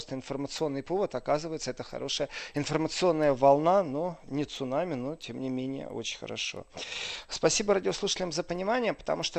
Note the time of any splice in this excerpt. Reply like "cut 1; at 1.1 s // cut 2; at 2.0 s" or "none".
none